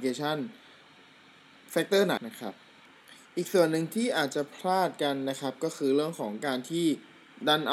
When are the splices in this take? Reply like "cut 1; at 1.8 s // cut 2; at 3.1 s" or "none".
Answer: cut 1; at 2.2 s